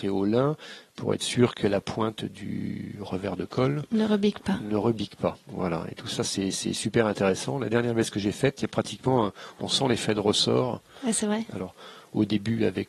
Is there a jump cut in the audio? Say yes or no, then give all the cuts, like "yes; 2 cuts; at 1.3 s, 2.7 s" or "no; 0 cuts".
yes; 1 cut; at 11.5 s